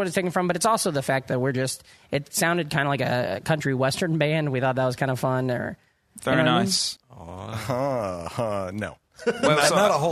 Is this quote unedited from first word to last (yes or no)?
no